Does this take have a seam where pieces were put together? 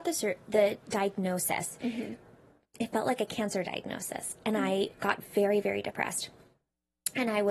no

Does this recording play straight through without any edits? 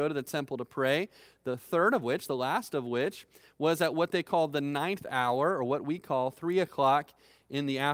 yes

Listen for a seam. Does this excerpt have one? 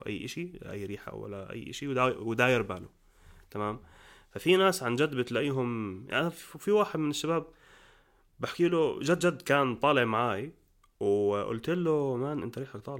no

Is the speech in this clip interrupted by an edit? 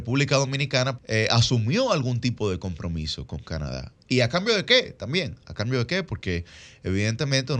yes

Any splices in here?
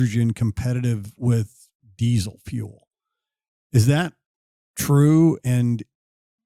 no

